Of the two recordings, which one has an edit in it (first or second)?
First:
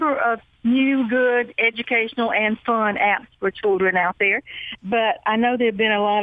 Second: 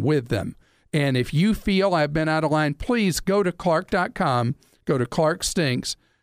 first